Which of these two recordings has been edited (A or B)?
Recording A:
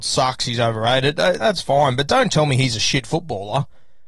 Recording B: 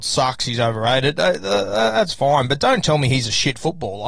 A